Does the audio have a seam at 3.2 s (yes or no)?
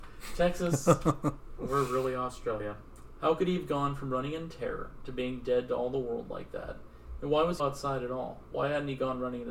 yes